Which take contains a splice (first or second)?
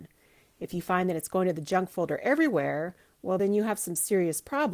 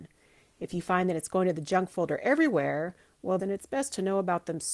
second